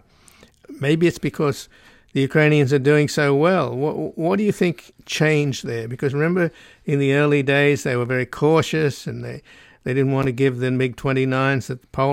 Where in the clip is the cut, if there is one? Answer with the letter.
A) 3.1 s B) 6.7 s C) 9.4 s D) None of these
D